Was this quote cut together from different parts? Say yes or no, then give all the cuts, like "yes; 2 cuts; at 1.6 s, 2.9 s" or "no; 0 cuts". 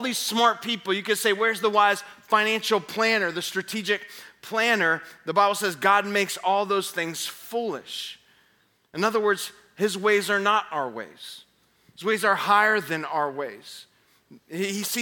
no; 0 cuts